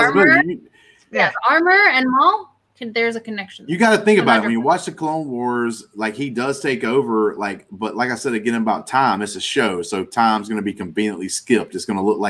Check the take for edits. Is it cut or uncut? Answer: uncut